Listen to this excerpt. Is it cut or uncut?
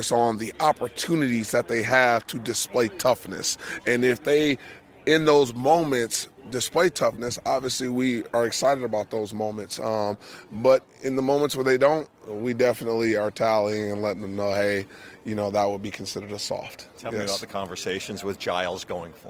uncut